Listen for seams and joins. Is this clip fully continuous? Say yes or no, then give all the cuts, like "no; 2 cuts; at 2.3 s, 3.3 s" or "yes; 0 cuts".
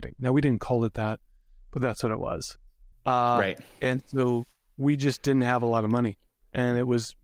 no; 1 cut; at 2.9 s